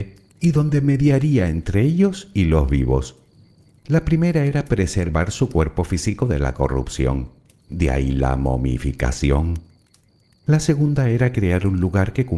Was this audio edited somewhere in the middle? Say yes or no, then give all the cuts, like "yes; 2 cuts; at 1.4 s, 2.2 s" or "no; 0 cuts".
yes; 1 cut; at 3.8 s